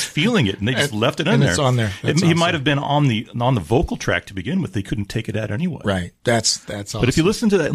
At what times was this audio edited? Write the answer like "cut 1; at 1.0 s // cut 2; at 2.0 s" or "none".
none